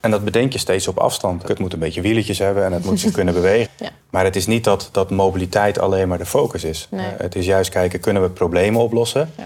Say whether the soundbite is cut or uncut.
cut